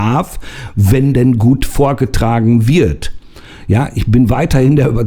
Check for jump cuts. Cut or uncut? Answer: uncut